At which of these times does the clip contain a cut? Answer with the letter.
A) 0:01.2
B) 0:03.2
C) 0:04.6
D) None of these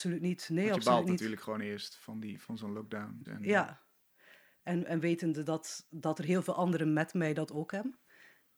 B